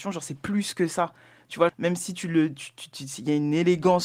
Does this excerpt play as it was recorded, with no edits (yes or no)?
no